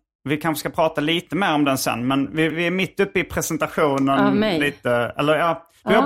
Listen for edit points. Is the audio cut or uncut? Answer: cut